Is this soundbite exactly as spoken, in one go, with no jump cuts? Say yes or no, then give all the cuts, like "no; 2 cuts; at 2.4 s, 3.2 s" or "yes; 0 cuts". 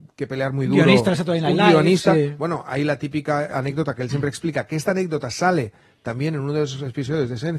yes; 0 cuts